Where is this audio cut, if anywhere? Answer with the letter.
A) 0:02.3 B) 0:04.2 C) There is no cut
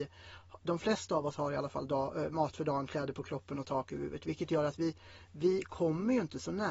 C